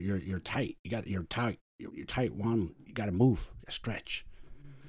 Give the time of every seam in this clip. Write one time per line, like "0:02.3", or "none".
0:01.9